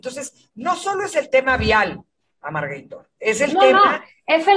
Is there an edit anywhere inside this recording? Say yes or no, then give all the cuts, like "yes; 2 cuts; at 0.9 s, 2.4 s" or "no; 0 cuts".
no; 0 cuts